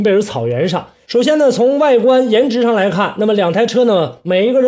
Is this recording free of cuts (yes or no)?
no